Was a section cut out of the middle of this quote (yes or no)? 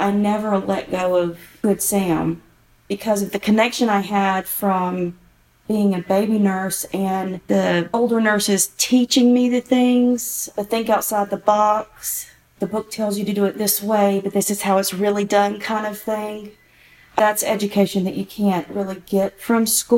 no